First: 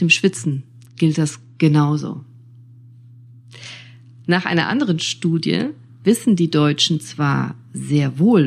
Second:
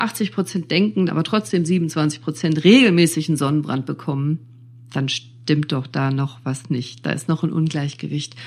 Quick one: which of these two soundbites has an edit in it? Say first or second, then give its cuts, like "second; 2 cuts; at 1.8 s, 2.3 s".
second; 1 cut; at 1.1 s